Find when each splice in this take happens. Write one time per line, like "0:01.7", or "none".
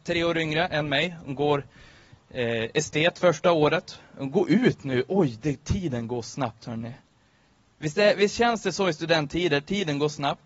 none